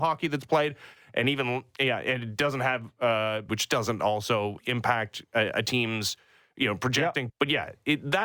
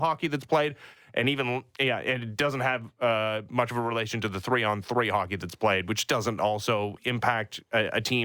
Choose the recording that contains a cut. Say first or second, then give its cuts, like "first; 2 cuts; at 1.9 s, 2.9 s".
first; 2 cuts; at 3.5 s, 7.3 s